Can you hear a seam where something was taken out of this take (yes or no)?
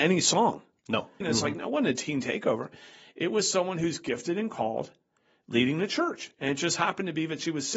yes